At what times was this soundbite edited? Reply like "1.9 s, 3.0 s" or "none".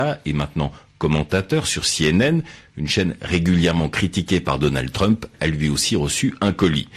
none